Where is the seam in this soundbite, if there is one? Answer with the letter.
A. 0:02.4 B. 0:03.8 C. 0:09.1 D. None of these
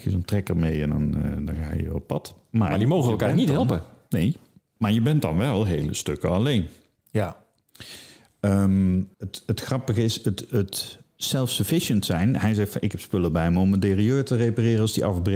C